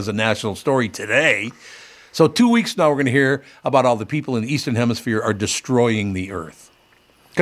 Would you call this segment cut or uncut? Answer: uncut